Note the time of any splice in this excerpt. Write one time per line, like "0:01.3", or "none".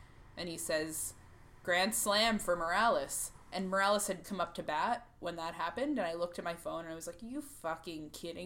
0:04.2